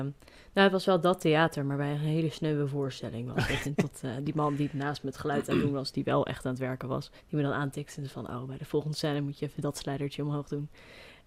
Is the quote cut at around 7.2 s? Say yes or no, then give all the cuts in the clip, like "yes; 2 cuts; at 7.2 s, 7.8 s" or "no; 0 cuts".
yes; 2 cuts; at 3.6 s, 7.2 s